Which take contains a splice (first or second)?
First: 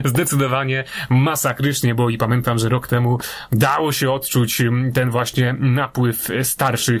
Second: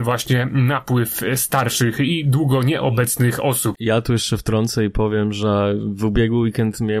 second